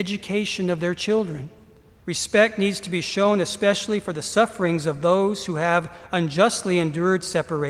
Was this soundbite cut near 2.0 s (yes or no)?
yes